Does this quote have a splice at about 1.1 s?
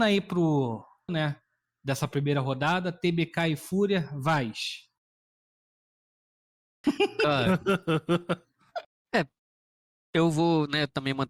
yes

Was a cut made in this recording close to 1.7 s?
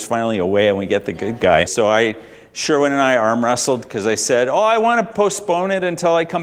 yes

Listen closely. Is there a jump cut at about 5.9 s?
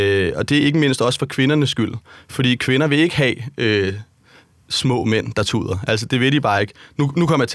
no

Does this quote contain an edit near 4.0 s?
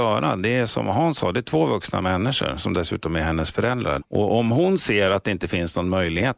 yes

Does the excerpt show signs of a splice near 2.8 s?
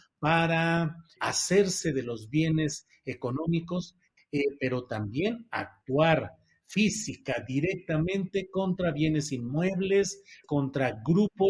no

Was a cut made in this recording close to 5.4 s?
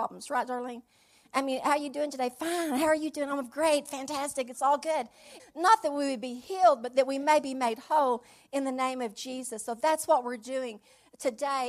yes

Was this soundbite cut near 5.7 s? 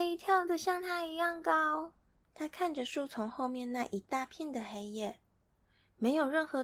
no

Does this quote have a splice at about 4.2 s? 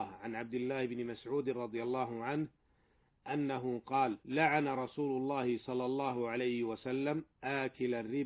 yes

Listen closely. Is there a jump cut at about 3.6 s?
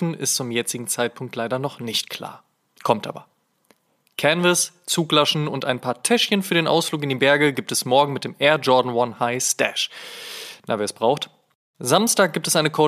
no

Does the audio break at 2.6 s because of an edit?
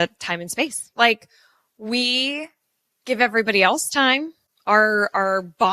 no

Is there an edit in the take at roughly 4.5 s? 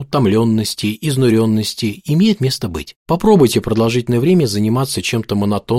no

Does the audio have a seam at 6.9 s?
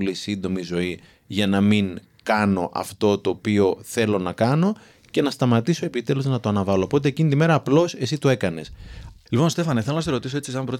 no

